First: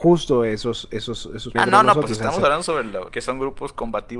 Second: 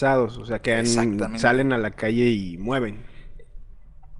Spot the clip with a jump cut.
first; 2 cuts; at 1.5 s, 3.1 s

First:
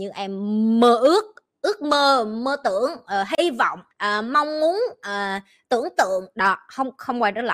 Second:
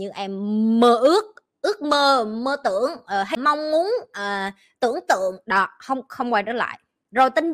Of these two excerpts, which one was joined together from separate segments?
second; 1 cut; at 3.4 s

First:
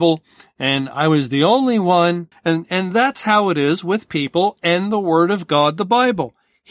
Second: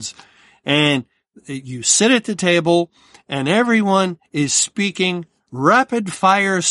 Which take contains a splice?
first; 1 cut; at 2.3 s

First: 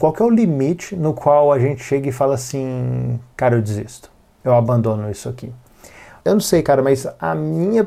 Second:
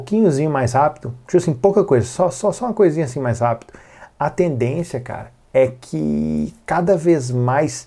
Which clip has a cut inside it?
first; 1 cut; at 6.2 s

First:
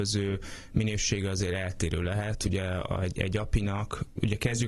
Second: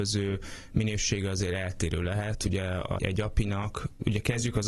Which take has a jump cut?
second; 1 cut; at 3.0 s

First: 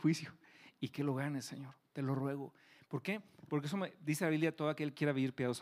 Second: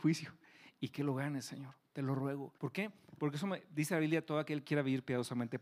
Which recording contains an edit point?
second; 1 cut; at 2.6 s

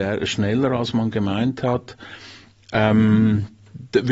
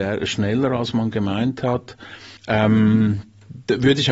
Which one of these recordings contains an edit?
second; 1 cut; at 2.4 s

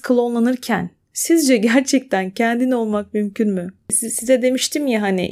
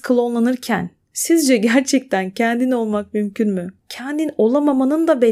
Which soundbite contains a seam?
second; 1 cut; at 3.8 s

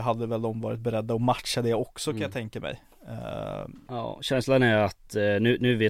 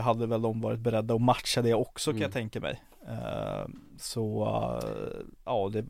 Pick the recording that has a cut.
first; 1 cut; at 3.9 s

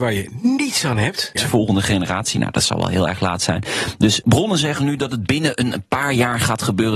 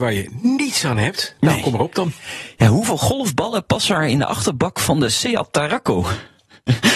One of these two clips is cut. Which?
first; 2 cuts; at 1.3 s, 4.2 s

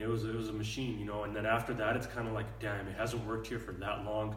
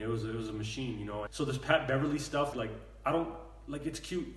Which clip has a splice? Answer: second; 2 cuts; at 1.3 s, 2.5 s

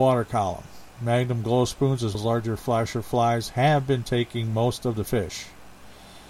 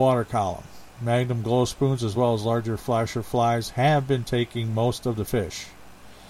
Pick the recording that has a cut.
first; 1 cut; at 2.1 s

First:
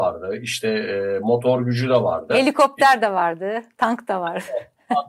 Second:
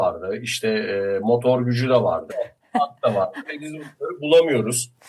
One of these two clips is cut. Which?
second; 1 cut; at 2.3 s

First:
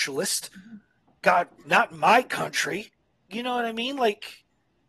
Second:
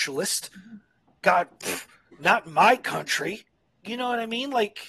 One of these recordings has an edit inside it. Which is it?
first; 1 cut; at 1.6 s

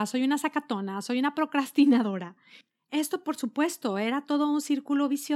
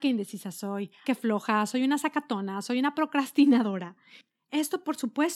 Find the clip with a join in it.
second; 1 cut; at 1.0 s

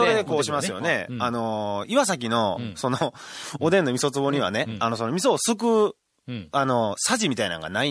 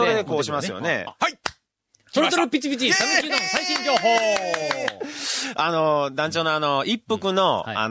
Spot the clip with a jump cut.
second; 1 cut; at 1.1 s

